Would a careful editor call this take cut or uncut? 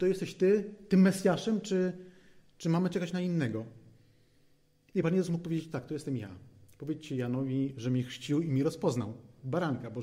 uncut